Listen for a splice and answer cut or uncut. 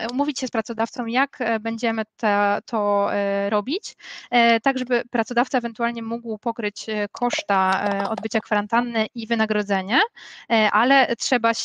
uncut